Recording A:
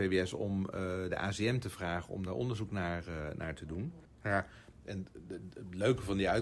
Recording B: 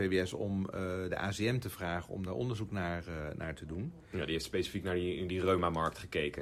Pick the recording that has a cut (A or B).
A